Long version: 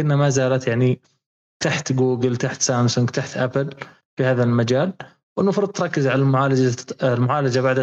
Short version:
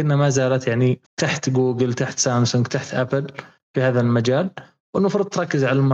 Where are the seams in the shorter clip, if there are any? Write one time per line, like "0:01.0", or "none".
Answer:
0:01.1